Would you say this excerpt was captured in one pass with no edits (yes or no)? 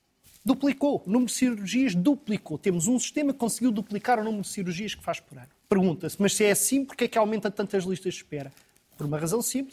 no